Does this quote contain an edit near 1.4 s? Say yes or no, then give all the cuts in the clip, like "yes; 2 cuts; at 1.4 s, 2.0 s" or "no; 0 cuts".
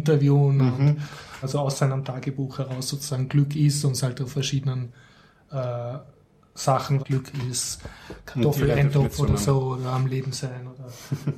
yes; 2 cuts; at 1.4 s, 7.0 s